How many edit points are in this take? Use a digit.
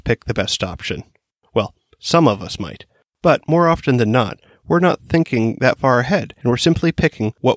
0